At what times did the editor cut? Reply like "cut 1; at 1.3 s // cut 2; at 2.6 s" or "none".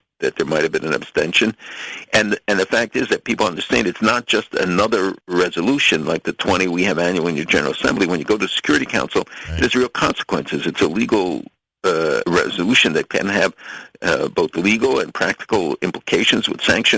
cut 1; at 5.2 s // cut 2; at 12.2 s